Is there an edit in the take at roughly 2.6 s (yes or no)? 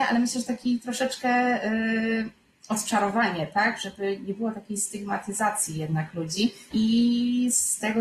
no